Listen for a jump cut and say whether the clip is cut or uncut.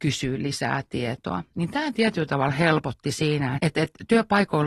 cut